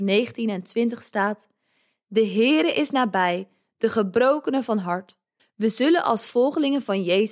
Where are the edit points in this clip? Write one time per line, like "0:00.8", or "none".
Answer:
0:05.4